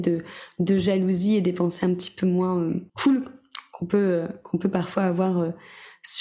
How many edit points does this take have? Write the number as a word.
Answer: one